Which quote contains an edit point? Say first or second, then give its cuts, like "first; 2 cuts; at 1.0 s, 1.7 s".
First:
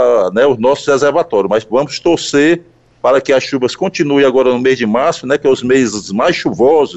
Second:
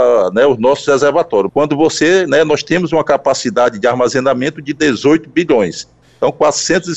second; 1 cut; at 1.5 s